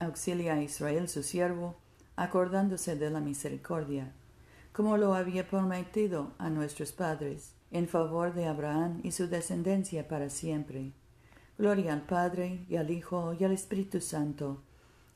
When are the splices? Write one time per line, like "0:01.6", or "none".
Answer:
0:07.6